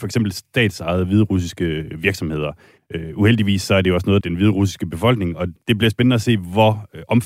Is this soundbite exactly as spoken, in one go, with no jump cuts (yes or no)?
no